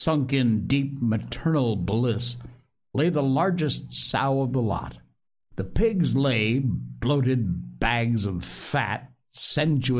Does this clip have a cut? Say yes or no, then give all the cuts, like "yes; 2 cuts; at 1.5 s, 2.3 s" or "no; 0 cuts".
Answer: yes; 1 cut; at 5.5 s